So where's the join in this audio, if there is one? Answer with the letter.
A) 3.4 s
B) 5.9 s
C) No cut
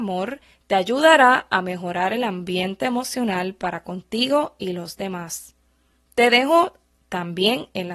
C